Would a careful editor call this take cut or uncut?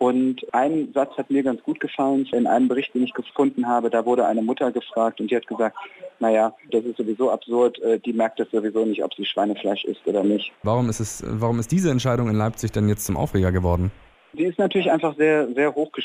cut